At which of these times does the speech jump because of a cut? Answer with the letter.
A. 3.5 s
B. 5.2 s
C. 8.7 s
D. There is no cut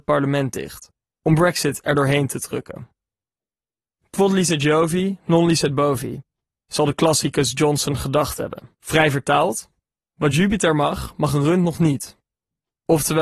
C